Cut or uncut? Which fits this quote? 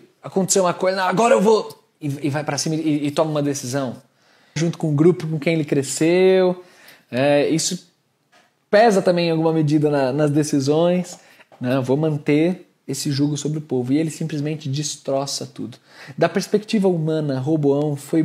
cut